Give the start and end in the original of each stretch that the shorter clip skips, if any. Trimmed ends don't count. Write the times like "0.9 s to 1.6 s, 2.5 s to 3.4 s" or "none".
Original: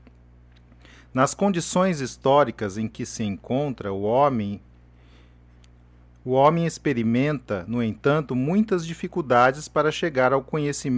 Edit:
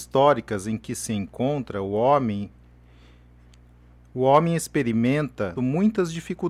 7.7 s to 8.3 s

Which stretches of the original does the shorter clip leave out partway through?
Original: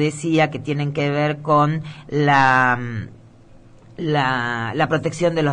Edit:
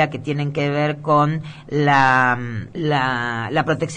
3.1 s to 3.9 s

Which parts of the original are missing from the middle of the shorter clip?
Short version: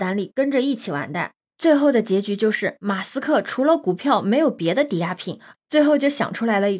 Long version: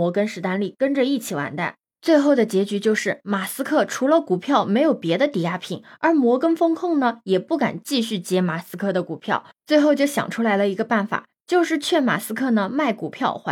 6.0 s to 9.5 s

